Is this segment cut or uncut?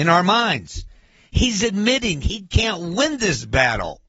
uncut